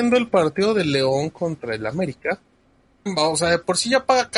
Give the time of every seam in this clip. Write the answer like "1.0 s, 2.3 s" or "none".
3.1 s